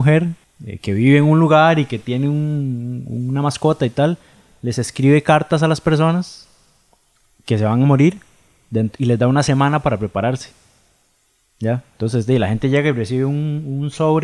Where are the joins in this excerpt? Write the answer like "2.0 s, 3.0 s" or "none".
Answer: none

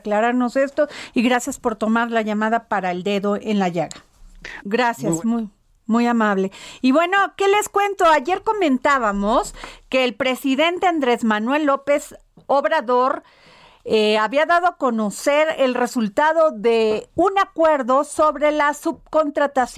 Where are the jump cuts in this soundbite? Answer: 4.6 s

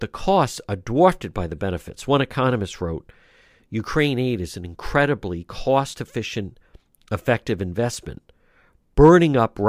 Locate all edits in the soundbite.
none

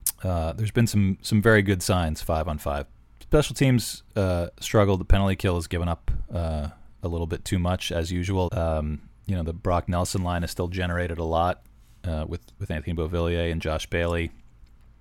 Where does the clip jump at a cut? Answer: 8.5 s

